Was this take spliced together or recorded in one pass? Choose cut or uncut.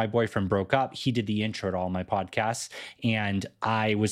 uncut